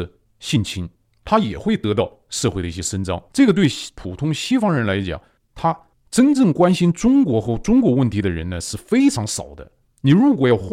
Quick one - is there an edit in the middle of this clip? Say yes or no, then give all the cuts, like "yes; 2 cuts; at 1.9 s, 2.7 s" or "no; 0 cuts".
yes; 1 cut; at 3.3 s